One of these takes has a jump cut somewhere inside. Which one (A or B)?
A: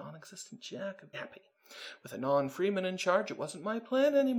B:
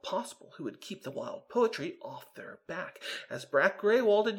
A